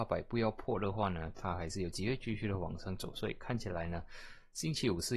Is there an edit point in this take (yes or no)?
no